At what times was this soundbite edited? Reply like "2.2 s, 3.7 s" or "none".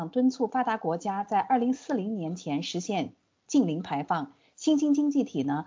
none